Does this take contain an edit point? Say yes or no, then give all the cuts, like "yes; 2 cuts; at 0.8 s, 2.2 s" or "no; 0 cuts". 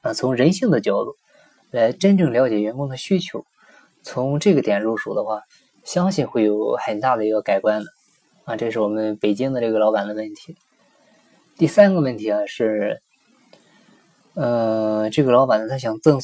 no; 0 cuts